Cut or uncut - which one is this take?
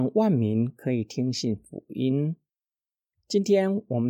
uncut